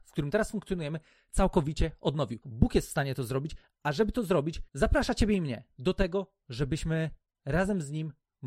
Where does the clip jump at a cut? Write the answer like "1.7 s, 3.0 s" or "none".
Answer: 2.4 s